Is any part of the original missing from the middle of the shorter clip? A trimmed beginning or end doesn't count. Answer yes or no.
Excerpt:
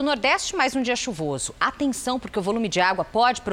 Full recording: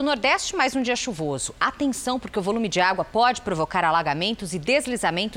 no